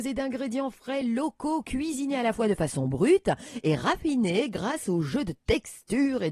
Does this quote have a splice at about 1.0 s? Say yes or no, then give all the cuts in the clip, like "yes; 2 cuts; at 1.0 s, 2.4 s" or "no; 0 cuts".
no; 0 cuts